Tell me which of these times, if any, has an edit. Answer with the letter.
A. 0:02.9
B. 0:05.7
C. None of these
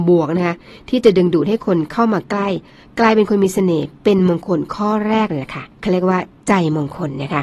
B